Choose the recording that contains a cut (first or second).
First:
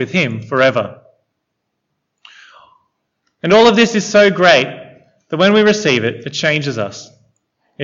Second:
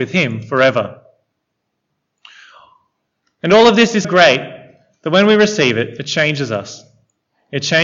second